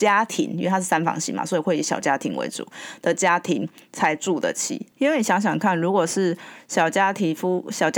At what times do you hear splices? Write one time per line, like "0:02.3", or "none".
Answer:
0:04.9